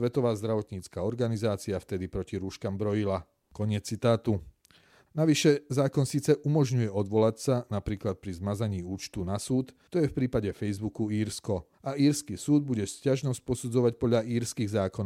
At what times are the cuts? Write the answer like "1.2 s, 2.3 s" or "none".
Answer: 9.9 s, 11.7 s